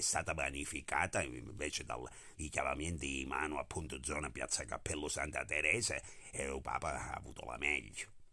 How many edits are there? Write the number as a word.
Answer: two